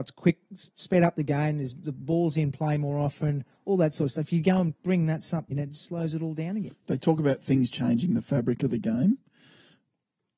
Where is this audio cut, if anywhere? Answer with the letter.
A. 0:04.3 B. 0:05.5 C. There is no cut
B